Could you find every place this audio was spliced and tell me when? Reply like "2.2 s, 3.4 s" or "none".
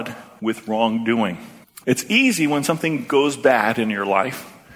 1.8 s